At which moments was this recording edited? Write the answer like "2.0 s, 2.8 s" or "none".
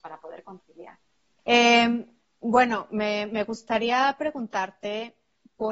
1.4 s